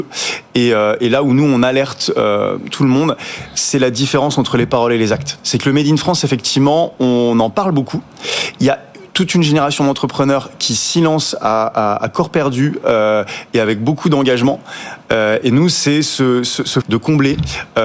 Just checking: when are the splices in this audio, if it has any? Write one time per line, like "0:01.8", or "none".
0:15.0
0:16.8